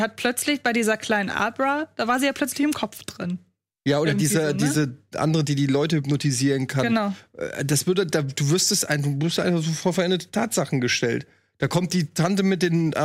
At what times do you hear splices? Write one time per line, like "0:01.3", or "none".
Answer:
none